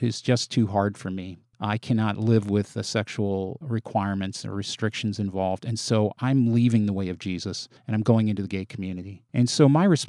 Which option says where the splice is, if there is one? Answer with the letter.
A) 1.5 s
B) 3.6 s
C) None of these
B